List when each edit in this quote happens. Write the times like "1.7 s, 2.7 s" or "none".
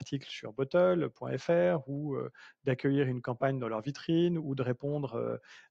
none